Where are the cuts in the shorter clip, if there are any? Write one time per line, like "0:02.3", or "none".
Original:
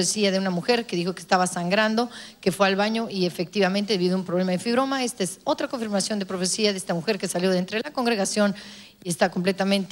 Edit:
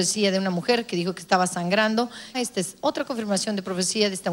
0:02.3